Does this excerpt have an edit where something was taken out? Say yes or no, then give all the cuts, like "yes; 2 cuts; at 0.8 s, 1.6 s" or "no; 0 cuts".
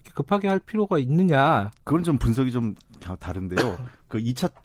yes; 1 cut; at 1.8 s